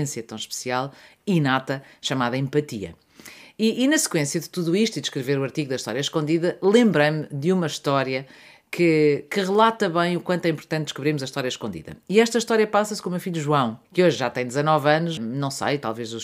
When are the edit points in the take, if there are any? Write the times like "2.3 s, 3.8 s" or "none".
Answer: 13.8 s, 15.2 s